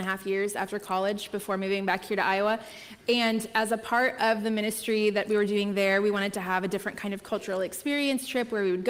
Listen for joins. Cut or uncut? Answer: uncut